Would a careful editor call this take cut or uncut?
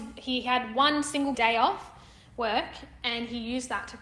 cut